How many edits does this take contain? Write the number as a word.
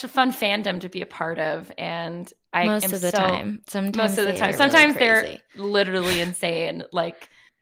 zero